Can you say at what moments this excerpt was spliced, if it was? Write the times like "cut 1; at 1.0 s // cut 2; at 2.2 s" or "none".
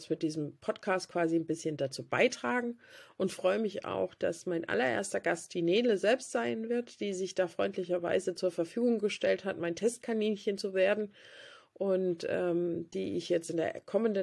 none